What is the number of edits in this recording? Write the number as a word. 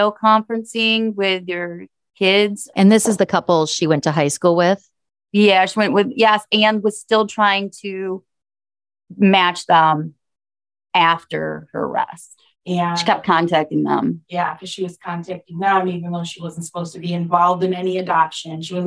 two